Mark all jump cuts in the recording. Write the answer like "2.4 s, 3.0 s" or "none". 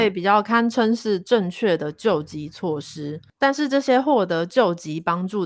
none